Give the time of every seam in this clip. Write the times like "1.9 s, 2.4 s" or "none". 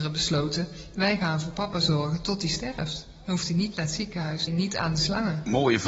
4.5 s